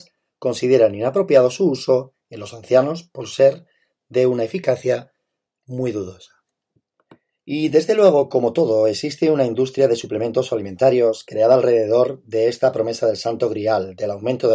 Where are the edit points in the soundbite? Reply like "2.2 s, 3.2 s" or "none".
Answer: none

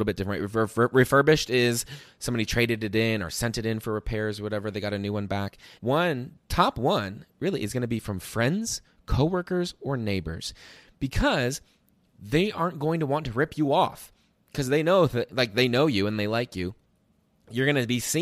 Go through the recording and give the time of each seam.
5.8 s

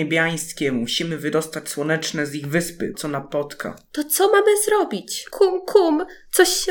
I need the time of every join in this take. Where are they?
2.9 s, 5.3 s

